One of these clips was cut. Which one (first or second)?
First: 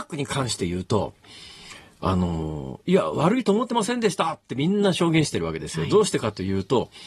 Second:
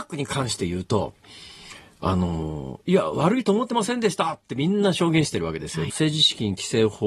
second